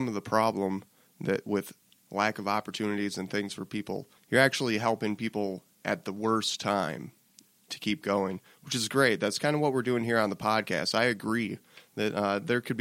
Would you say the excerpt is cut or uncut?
uncut